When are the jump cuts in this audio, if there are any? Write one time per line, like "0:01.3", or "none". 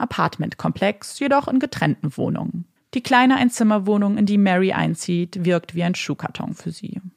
0:02.8